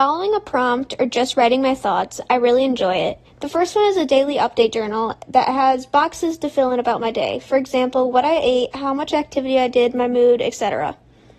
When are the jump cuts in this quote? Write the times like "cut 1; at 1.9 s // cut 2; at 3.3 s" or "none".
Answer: cut 1; at 3.3 s